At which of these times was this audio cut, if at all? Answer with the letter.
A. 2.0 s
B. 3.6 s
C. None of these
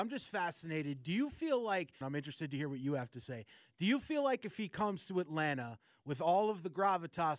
A